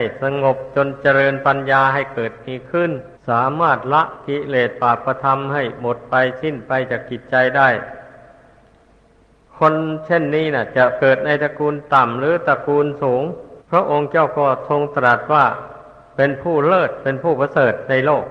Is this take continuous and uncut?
no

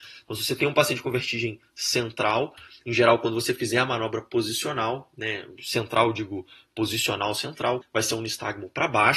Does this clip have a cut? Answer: yes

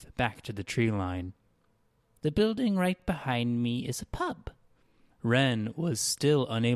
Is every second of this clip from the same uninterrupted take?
no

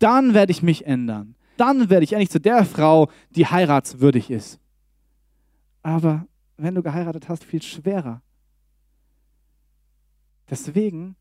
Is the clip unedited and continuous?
no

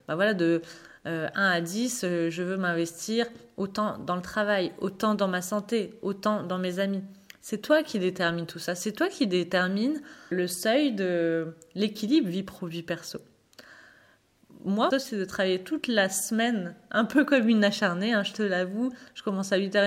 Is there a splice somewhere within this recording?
yes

